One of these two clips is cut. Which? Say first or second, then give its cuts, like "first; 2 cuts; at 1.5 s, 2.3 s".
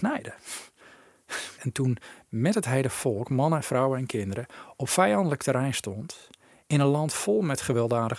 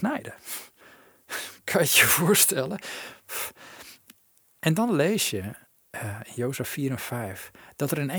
first; 1 cut; at 1.6 s